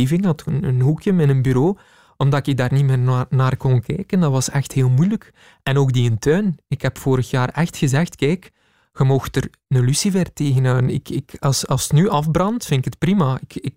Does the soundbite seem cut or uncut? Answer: uncut